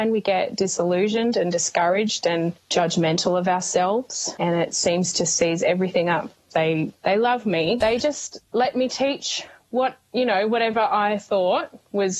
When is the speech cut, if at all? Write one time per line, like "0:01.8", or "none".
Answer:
0:06.5
0:07.8